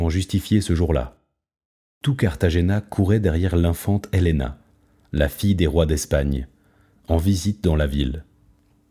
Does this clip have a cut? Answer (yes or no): no